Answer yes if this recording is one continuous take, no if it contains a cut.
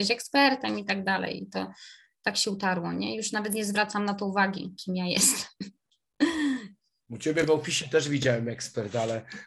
yes